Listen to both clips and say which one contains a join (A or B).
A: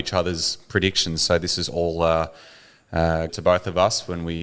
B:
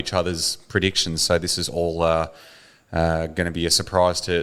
A